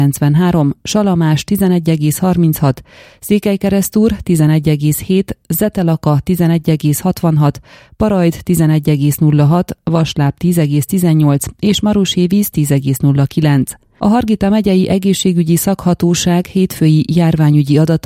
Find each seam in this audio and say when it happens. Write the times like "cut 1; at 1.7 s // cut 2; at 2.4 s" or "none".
none